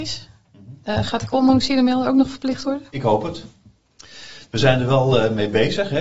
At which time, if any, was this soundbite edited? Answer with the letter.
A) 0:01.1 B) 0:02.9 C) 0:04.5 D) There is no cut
D